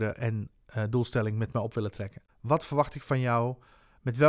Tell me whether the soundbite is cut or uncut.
cut